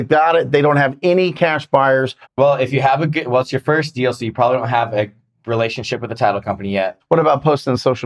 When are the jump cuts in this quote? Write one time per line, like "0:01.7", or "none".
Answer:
0:02.2
0:07.0

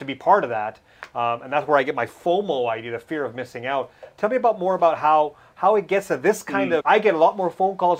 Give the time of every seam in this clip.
0:06.8

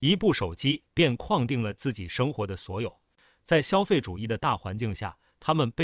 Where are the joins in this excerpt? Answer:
none

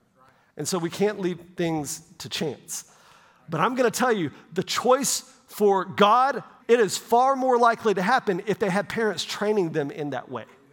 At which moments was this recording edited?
0:03.4
0:06.6

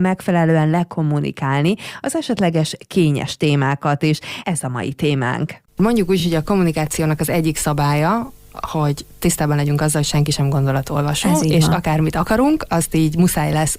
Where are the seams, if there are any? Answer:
none

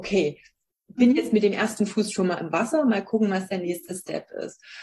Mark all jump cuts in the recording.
none

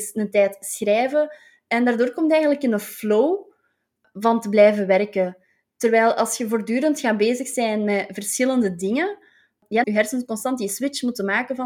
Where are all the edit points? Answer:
0:09.8

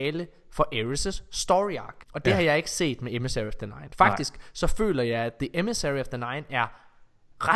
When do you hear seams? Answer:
0:02.0

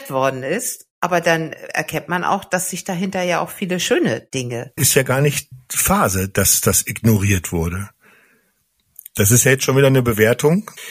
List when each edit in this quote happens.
0:00.9
0:04.8

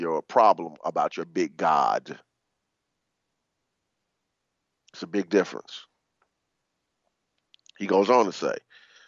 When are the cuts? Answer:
none

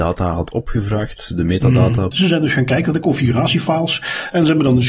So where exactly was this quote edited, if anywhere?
0:02.1

